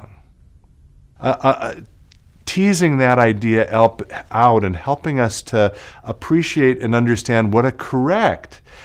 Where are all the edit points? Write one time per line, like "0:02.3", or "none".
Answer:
0:01.2

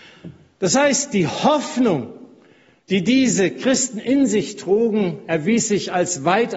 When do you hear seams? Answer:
none

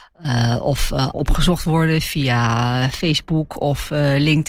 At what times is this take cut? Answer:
0:01.1

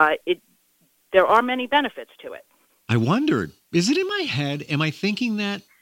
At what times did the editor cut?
0:02.8

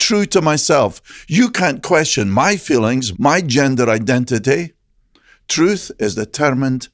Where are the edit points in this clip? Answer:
0:03.1

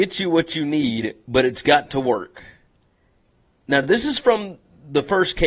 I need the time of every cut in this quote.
none

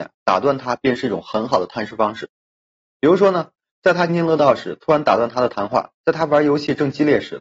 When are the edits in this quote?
0:04.1

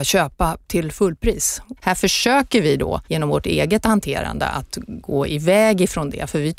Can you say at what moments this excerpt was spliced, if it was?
0:01.8
0:03.0

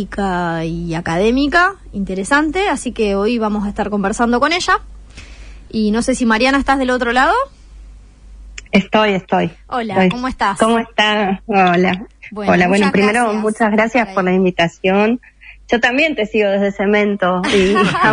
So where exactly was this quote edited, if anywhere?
none

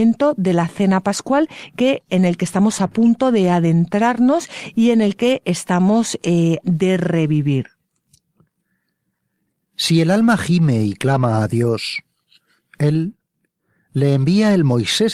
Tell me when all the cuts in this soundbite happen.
0:06.6

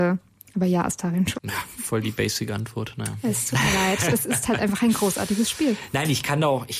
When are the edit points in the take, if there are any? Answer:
0:01.4

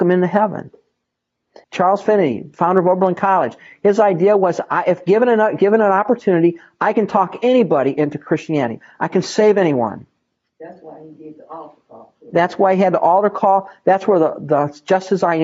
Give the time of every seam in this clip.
0:01.6

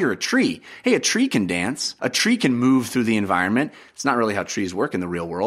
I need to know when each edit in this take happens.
0:02.0

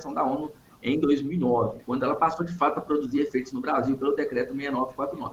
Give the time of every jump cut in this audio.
0:01.8

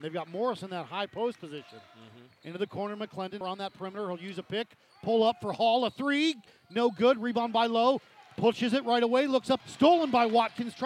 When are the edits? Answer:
0:03.4
0:09.6

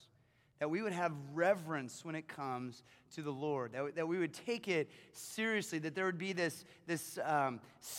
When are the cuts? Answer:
0:03.9

